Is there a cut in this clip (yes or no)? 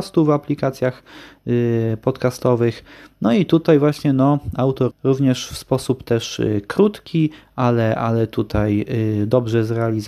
yes